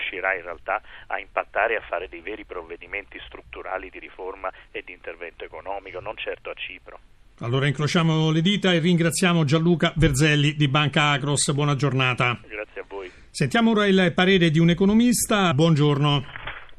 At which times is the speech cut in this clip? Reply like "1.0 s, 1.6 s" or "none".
15.5 s